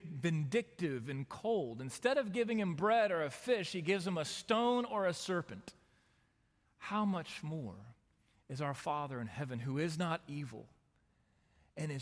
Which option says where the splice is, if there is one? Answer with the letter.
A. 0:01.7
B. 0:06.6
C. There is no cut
B